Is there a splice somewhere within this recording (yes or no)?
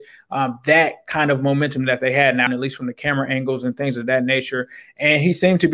yes